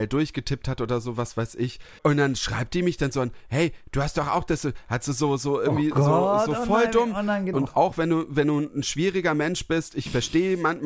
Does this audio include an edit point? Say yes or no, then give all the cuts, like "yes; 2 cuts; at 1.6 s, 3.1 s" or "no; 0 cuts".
yes; 2 cuts; at 2.0 s, 7.5 s